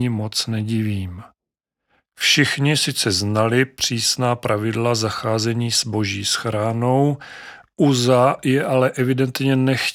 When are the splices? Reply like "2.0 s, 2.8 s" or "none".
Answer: none